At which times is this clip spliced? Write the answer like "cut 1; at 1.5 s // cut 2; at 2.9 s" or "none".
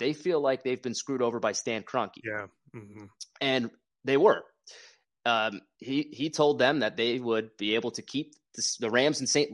none